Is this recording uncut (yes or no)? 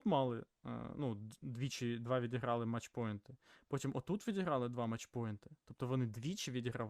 yes